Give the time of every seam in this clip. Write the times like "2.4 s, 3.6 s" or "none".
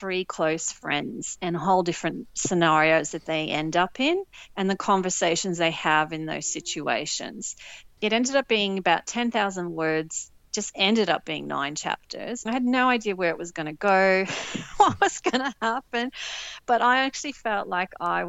12.5 s